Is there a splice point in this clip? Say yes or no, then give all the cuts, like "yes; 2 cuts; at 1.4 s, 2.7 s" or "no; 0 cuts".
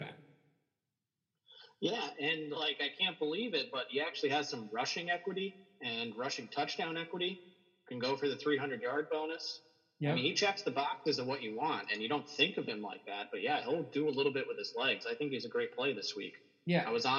no; 0 cuts